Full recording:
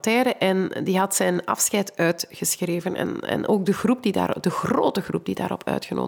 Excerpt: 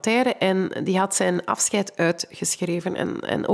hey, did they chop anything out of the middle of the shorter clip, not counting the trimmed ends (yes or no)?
no